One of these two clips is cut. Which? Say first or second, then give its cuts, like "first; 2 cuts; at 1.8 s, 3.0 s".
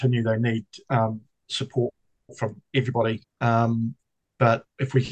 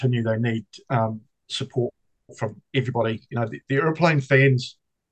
first; 1 cut; at 3.2 s